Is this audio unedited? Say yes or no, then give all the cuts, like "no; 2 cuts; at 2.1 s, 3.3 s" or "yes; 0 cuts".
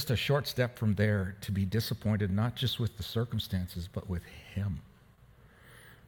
yes; 0 cuts